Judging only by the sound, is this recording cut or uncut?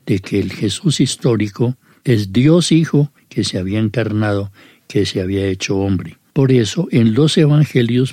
cut